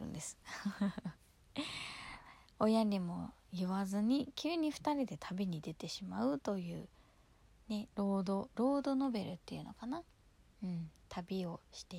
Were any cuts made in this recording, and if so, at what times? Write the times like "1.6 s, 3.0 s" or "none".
none